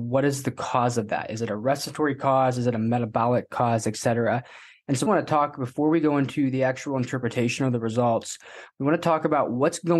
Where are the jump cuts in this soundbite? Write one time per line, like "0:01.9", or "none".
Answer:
0:05.1